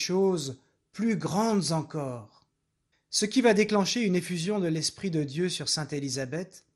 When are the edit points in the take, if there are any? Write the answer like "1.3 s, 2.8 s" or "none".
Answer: 2.9 s

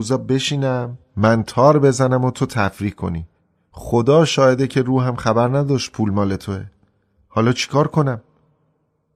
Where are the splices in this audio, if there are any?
none

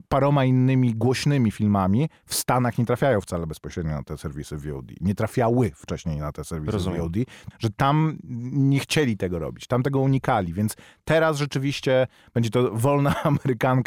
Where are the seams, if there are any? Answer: 7.5 s

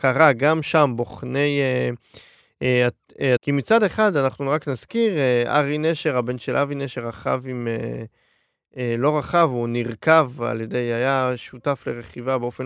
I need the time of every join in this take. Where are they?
3.4 s

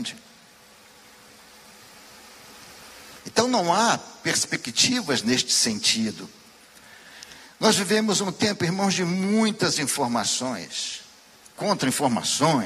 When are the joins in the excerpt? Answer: none

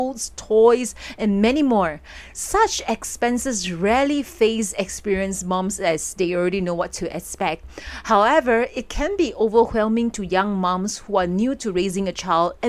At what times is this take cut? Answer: none

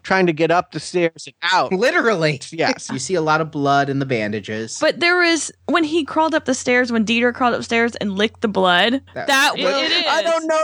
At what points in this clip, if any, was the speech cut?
2.9 s, 9.5 s

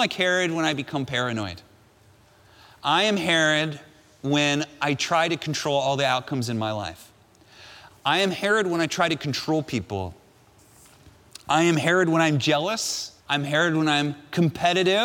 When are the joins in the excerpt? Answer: 7.9 s, 13.2 s

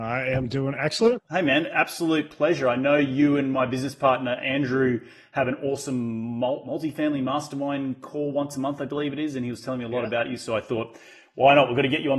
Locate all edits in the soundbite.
1.2 s

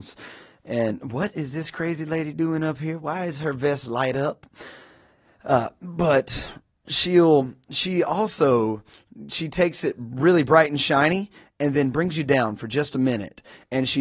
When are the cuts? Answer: none

